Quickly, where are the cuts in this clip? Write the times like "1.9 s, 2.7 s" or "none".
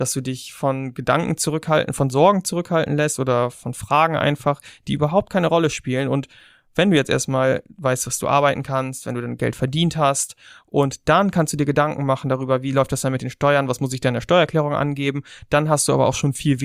none